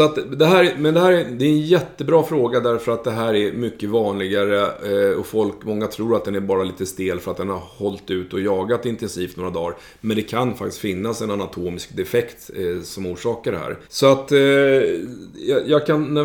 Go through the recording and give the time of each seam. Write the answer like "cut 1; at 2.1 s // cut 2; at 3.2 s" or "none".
cut 1; at 13.8 s